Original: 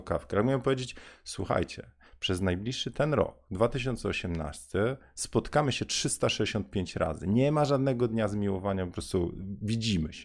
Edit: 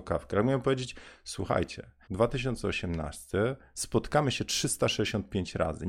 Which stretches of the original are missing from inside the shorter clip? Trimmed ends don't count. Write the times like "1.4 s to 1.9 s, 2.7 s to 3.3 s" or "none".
2.0 s to 3.4 s